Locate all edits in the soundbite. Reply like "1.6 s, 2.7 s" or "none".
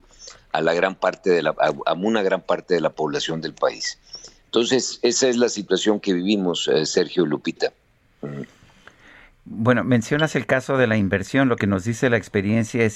none